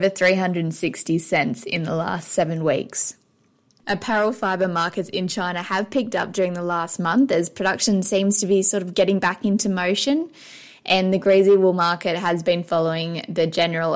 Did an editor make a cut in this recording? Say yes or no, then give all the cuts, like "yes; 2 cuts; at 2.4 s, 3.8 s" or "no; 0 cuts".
no; 0 cuts